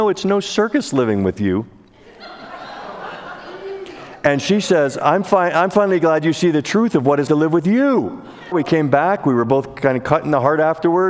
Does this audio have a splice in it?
yes; 2 cuts; at 7.3 s, 8.5 s

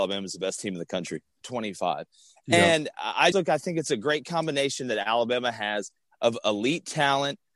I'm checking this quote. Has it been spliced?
yes; 2 cuts; at 1.4 s, 3.3 s

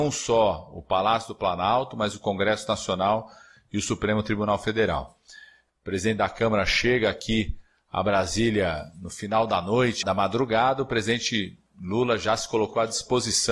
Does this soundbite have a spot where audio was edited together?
yes; 2 cuts; at 5.7 s, 10.0 s

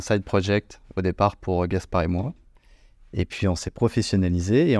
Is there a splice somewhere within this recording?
no; 0 cuts

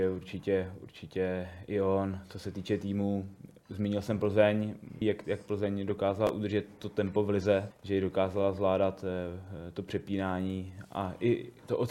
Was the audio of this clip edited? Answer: yes; 2 cuts; at 5.0 s, 7.7 s

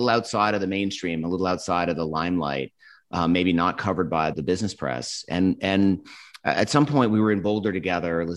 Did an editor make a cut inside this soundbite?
yes; 1 cut; at 4.3 s

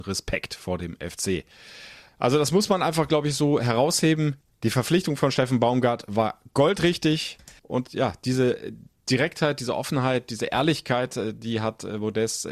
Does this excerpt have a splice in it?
yes; 1 cut; at 7.6 s

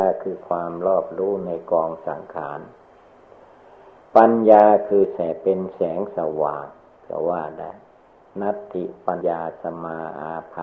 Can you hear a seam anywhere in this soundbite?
yes; 1 cut; at 9.2 s

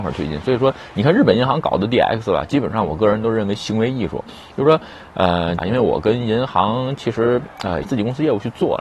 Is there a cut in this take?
yes; 2 cuts; at 5.6 s, 7.8 s

